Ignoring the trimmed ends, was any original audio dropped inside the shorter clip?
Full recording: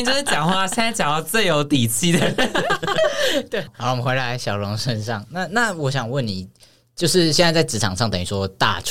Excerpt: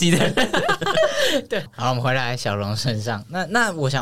no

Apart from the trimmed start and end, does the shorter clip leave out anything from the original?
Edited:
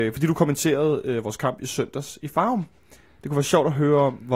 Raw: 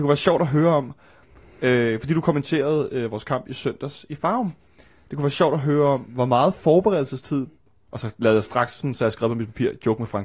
no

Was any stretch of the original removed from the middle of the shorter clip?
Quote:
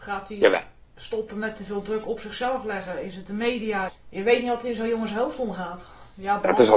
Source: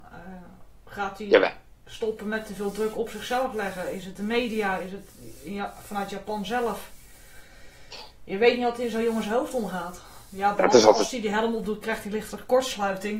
yes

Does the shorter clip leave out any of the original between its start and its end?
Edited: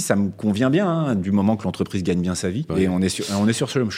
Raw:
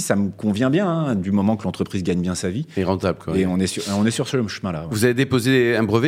yes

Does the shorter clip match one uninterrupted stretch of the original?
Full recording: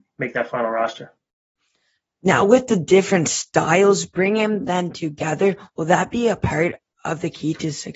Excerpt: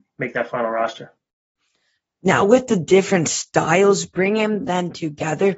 yes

